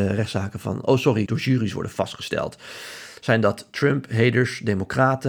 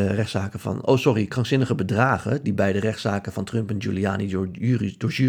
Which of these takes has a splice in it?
first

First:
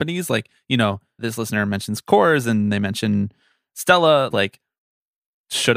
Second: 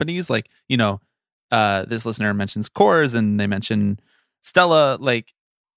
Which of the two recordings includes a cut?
first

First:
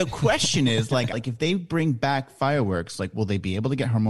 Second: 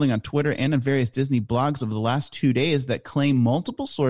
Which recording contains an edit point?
first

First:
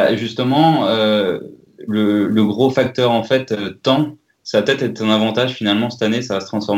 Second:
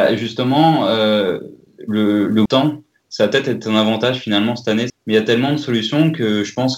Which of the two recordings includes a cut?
second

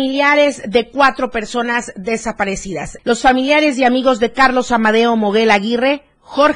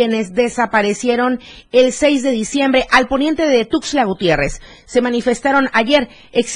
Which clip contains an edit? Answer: first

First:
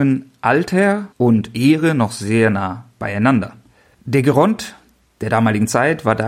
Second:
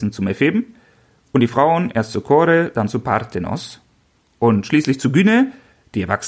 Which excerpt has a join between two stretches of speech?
first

